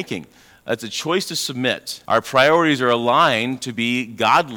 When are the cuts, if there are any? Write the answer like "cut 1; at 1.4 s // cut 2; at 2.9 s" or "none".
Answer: cut 1; at 2.0 s